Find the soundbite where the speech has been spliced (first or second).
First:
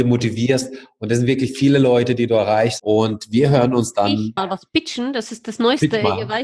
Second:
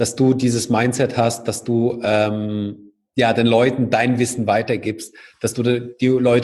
first